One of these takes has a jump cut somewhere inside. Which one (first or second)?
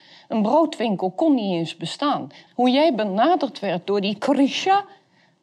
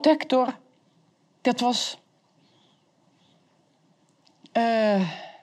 first